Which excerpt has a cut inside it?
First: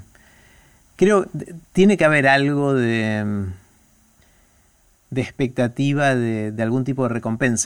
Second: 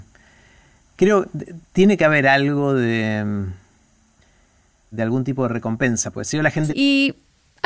second; 2 cuts; at 4.9 s, 6.7 s

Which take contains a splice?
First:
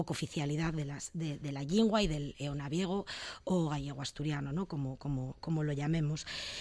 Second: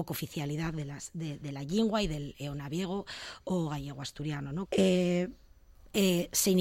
second; 1 cut; at 4.7 s

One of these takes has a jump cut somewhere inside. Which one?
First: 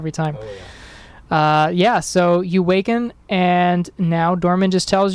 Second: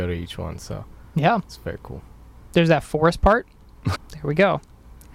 second; 2 cuts; at 1.4 s, 3.9 s

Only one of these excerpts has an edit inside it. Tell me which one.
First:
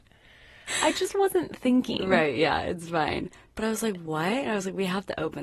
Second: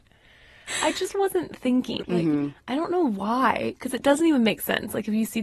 second; 1 cut; at 2.0 s

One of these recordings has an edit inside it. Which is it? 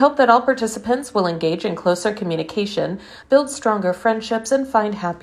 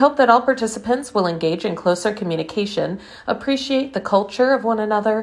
first; 1 cut; at 3.2 s

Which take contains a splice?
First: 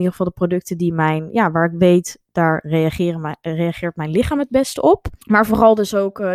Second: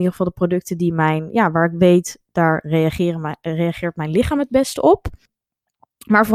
first; 1 cut; at 5.2 s

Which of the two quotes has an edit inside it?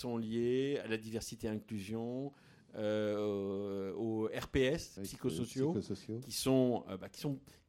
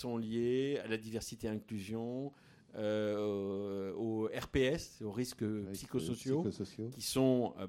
first; 1 cut; at 5.0 s

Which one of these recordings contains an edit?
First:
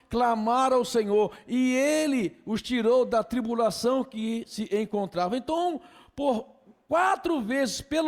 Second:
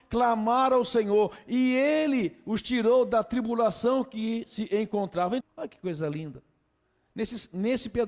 second; 1 cut; at 5.4 s

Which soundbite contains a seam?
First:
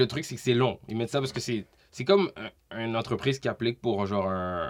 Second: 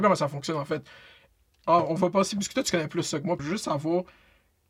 second; 1 cut; at 3.4 s

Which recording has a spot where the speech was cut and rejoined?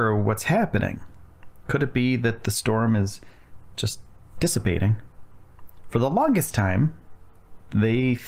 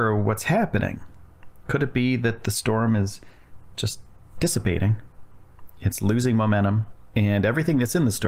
first; 1 cut; at 5.8 s

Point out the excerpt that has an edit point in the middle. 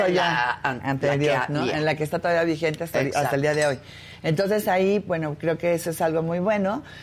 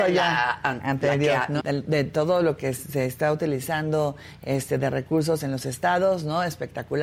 second; 1 cut; at 1.6 s

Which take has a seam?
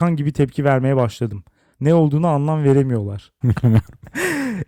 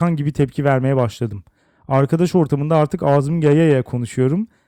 first; 2 cuts; at 1.7 s, 3.4 s

